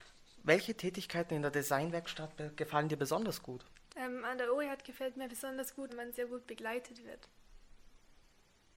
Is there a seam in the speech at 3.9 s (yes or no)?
yes